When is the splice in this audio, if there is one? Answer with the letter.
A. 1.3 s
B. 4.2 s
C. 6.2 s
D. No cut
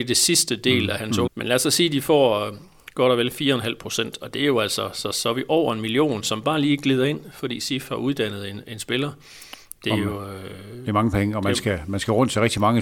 A